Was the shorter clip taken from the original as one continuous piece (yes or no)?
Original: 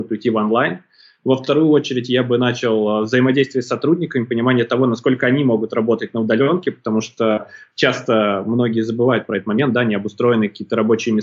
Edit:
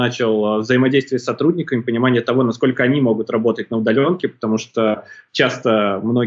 yes